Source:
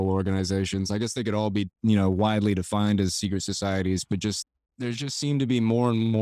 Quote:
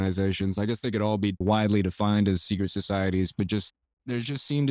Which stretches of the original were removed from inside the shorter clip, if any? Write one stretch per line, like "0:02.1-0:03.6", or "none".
0:01.7-0:02.1